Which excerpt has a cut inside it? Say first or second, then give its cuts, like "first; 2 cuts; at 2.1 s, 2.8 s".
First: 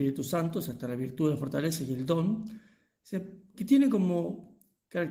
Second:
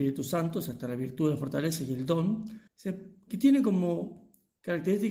second; 1 cut; at 2.7 s